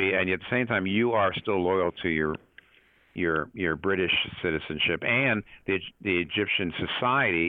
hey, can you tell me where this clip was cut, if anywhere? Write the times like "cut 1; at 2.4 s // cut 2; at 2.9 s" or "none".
none